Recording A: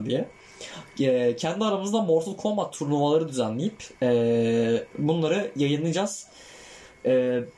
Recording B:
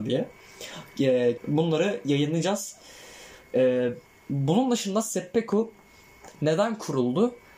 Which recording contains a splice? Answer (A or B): B